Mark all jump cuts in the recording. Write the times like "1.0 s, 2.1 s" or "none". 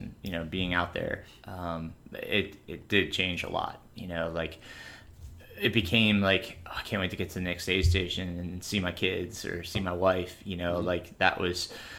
none